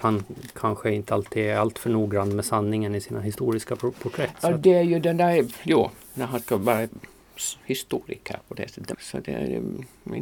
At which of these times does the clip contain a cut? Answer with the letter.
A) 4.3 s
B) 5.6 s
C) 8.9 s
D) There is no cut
C